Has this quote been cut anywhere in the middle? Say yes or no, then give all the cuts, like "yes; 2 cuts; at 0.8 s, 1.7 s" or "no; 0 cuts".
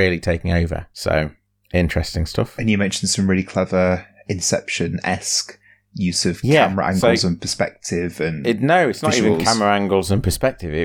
no; 0 cuts